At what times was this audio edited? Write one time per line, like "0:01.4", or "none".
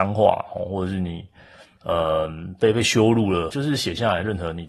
0:01.8
0:03.5